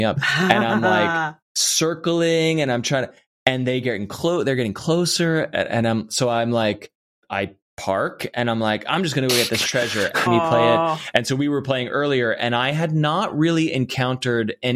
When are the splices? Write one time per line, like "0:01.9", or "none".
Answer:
0:07.2
0:10.3